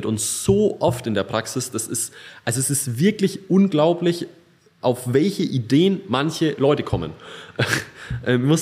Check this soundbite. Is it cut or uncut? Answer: uncut